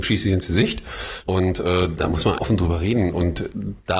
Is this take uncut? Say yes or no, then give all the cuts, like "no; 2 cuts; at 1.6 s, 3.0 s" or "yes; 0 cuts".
no; 2 cuts; at 1.2 s, 2.4 s